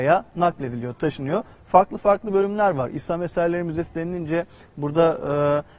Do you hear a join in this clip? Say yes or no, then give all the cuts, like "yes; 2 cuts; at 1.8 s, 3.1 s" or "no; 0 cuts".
yes; 1 cut; at 1.6 s